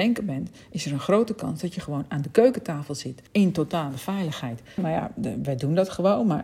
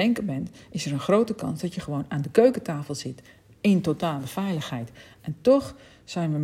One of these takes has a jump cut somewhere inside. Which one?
first; 2 cuts; at 3.3 s, 4.8 s

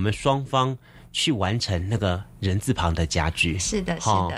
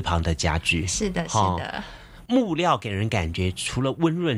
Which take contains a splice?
second; 1 cut; at 2.3 s

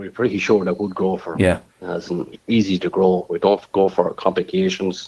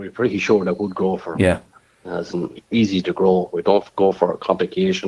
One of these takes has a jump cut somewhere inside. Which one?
first; 1 cut; at 1.7 s

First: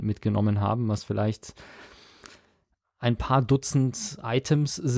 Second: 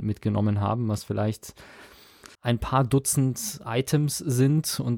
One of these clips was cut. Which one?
second; 1 cut; at 2.3 s

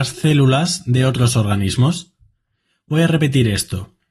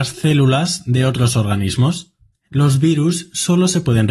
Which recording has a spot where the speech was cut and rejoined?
second; 1 cut; at 2.3 s

